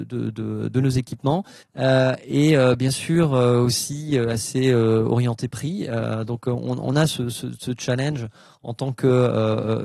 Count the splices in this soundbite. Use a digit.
1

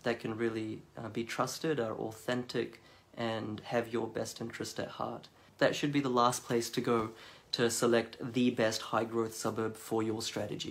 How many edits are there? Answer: 1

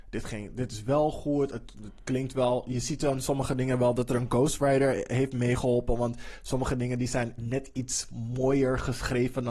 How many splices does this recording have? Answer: 1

